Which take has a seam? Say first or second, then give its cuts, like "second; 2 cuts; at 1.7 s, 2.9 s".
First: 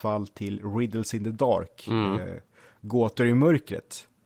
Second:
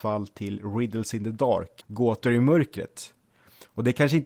second; 1 cut; at 1.8 s